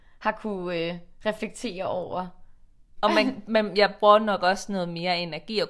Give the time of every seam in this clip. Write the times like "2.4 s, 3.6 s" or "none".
3.0 s